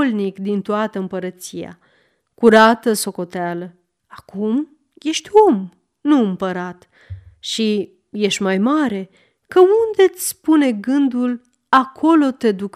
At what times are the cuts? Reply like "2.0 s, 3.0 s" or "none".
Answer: 4.0 s